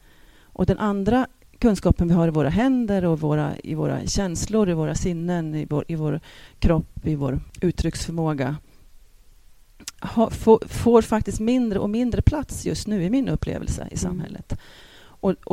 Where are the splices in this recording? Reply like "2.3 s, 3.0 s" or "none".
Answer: none

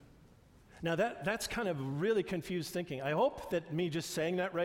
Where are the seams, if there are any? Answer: none

